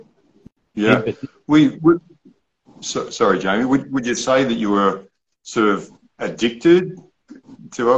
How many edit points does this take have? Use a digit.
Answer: 0